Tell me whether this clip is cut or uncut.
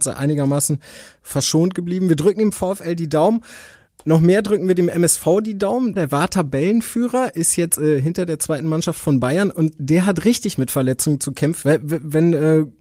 cut